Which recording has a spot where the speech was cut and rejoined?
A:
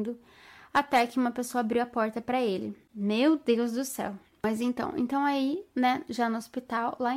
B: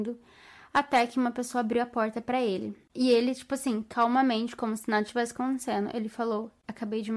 A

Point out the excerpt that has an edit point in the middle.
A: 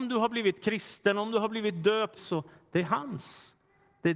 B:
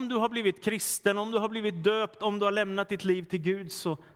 A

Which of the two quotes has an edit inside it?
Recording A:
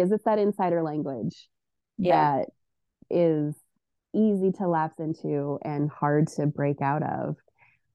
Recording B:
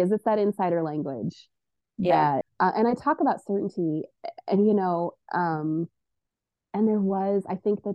B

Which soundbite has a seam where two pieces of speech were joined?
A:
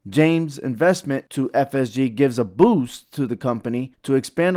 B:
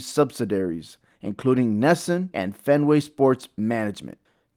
B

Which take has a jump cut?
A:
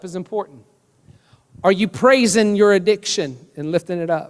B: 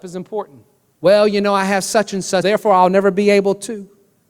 B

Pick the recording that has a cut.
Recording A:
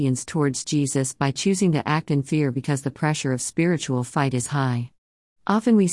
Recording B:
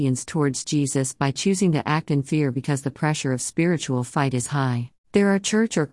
B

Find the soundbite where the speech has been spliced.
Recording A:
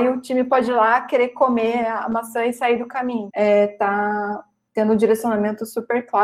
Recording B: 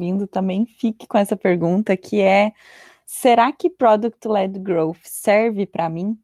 A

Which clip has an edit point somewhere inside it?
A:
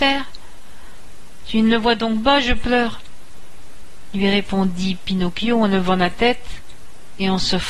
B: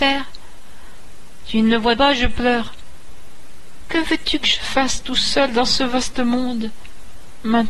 B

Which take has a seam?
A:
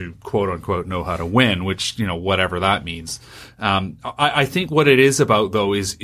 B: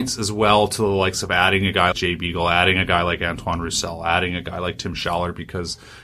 B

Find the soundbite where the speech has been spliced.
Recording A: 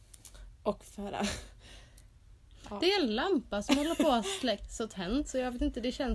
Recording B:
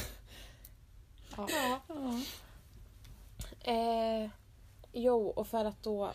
B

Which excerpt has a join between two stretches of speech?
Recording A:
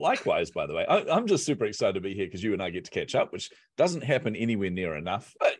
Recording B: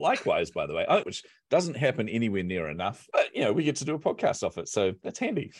B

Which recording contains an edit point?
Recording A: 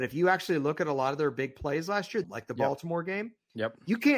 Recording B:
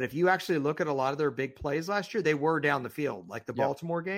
A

